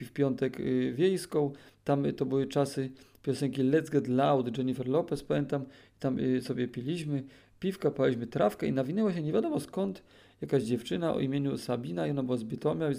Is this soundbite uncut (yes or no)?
yes